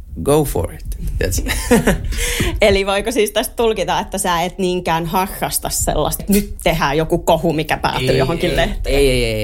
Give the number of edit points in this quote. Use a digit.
1